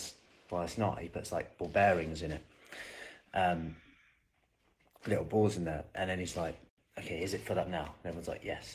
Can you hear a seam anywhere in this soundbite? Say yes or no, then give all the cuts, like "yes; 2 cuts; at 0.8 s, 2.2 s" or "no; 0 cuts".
no; 0 cuts